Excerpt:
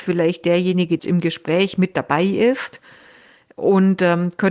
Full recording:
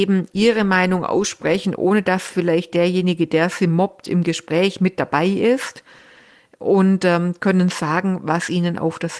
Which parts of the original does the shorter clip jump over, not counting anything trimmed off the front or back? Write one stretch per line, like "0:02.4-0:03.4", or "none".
0:03.3-0:04.0